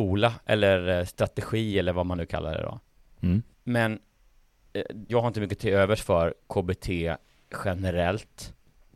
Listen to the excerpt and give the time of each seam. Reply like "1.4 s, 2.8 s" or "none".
3.5 s, 5.1 s